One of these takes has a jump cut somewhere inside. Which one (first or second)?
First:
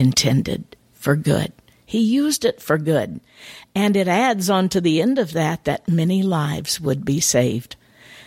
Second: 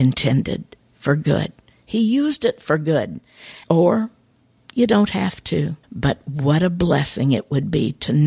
second